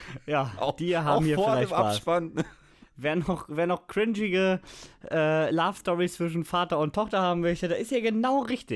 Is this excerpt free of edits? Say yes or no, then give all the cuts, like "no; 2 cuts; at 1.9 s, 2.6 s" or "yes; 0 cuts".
yes; 0 cuts